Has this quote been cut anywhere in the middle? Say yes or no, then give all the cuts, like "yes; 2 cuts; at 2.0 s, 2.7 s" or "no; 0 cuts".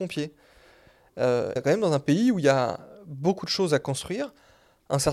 yes; 1 cut; at 1.6 s